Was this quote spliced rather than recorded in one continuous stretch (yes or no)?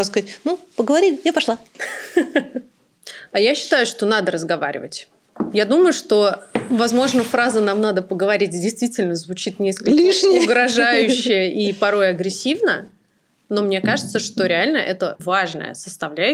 yes